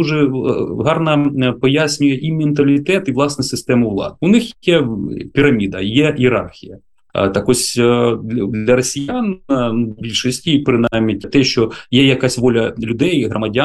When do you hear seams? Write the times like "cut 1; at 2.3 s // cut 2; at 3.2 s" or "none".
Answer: cut 1; at 7.1 s // cut 2; at 11.2 s

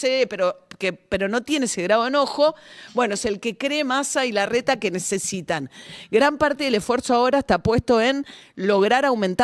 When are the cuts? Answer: none

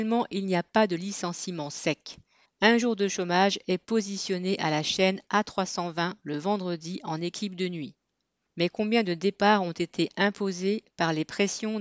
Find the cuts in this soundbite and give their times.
cut 1; at 2.5 s // cut 2; at 8.5 s

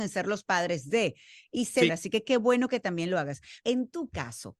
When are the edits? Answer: cut 1; at 1.9 s // cut 2; at 3.6 s

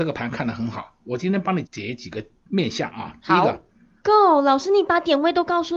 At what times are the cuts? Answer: cut 1; at 1.6 s // cut 2; at 4.0 s

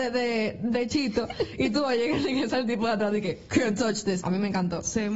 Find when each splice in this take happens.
cut 1; at 4.2 s

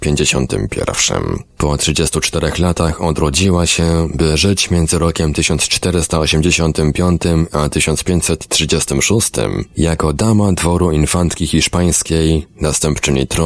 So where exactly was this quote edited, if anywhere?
none

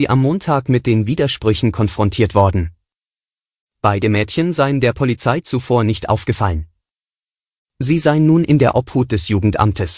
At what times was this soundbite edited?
cut 1; at 3.6 s

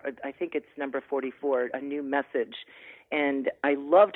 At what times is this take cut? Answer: none

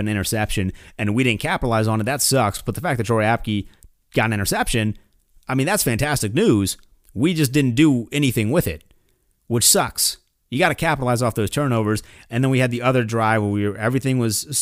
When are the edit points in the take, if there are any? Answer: none

